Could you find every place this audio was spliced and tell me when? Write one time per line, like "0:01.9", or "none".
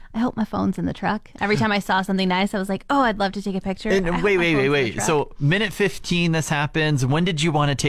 none